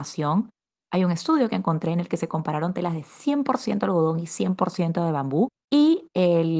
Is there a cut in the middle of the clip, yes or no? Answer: no